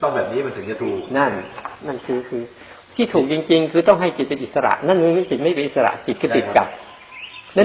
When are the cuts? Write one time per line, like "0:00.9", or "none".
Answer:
none